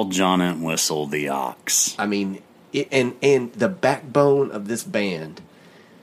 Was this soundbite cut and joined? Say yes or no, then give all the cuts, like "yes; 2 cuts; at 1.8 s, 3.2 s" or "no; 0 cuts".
no; 0 cuts